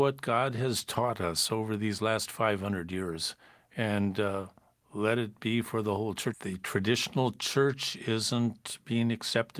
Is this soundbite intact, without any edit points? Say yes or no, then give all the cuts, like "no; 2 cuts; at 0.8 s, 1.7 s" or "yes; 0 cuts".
no; 1 cut; at 6.3 s